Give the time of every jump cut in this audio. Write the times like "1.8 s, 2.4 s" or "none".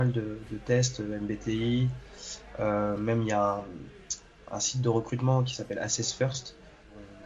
4.5 s